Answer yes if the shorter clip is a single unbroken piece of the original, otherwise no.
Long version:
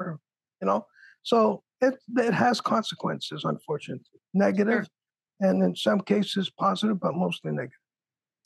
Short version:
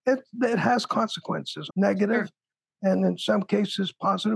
no